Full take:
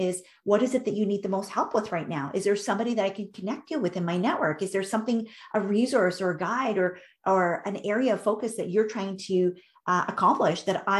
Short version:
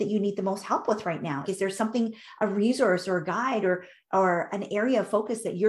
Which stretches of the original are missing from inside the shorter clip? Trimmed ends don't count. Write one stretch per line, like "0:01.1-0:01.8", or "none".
0:02.3-0:04.6